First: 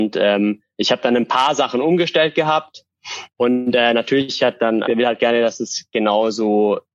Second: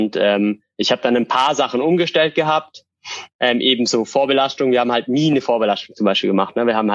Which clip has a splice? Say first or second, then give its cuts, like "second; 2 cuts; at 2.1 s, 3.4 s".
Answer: first; 2 cuts; at 3.3 s, 4.8 s